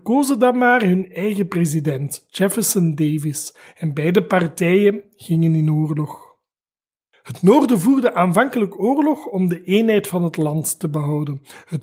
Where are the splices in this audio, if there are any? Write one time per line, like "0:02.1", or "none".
none